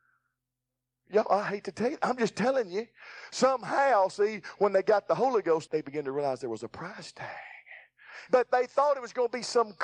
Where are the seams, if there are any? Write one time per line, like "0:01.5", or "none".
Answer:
0:05.7
0:08.3